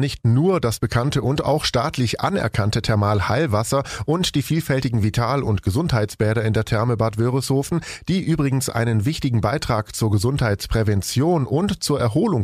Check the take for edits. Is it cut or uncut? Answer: uncut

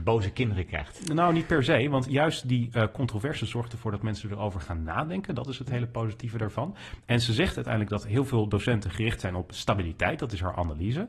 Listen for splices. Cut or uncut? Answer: uncut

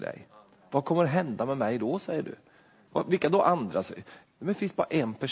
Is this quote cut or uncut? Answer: cut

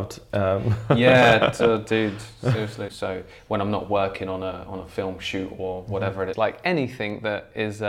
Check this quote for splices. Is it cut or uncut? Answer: cut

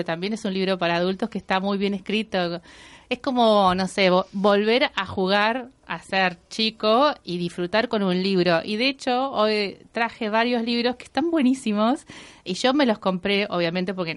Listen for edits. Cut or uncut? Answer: uncut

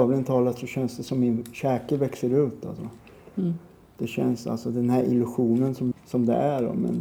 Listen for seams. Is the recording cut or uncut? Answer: cut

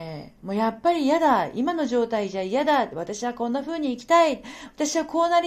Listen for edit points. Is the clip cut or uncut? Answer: uncut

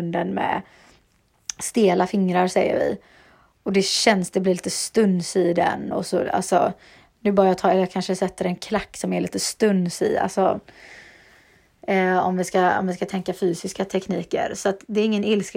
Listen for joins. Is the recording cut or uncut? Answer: uncut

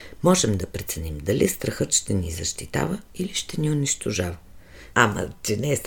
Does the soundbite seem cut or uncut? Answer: cut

